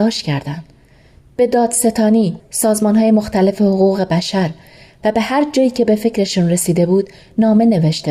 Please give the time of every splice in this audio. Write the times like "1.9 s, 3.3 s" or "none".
2.4 s